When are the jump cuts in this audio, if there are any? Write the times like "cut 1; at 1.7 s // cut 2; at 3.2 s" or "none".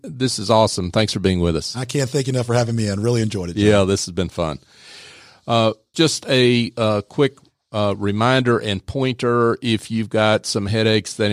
cut 1; at 5.9 s